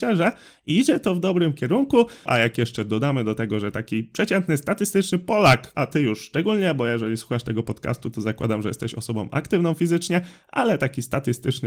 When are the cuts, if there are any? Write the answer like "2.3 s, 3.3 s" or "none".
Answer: 2.3 s, 5.7 s